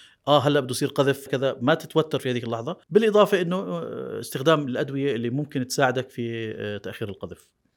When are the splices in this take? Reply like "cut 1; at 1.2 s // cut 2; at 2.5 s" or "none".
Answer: cut 1; at 1.3 s // cut 2; at 2.8 s

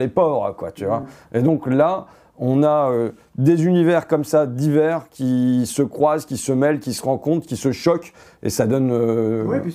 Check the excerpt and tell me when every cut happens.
none

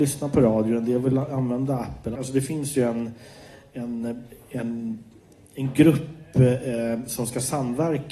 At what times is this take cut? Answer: cut 1; at 2.2 s

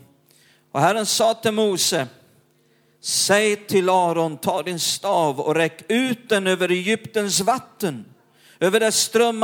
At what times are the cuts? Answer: none

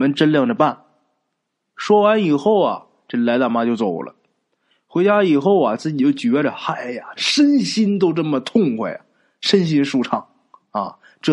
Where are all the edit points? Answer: cut 1; at 7.2 s

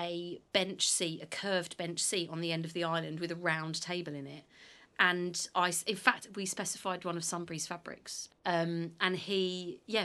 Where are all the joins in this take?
cut 1; at 8.3 s

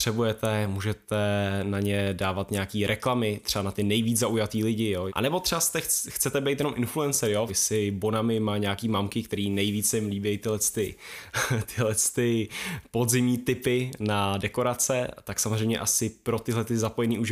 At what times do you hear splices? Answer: cut 1; at 5.1 s // cut 2; at 7.5 s

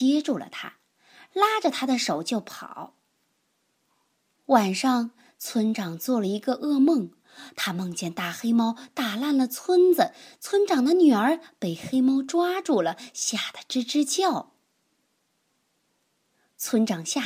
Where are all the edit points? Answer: cut 1; at 4.3 s

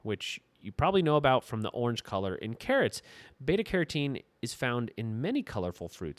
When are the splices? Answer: none

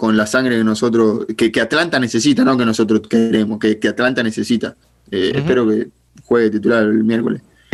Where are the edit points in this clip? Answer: none

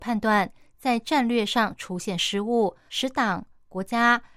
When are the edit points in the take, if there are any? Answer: cut 1; at 2.9 s

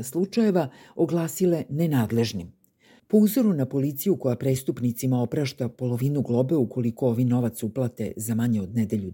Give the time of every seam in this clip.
cut 1; at 3.0 s

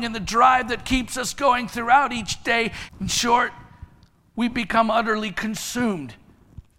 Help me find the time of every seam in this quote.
cut 1; at 2.9 s

